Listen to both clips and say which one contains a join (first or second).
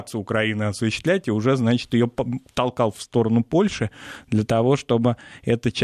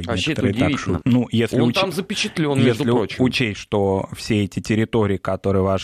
second